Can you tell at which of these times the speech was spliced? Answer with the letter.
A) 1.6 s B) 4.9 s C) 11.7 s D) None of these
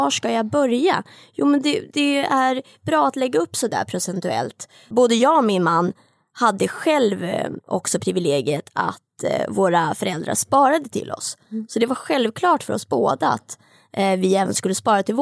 B